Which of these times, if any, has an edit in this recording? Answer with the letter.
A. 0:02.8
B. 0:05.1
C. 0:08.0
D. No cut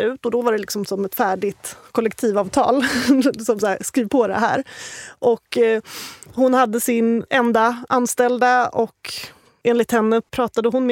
D